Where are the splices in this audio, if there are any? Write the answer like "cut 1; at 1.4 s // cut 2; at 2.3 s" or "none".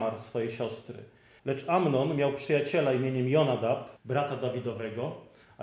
cut 1; at 1.4 s // cut 2; at 4.0 s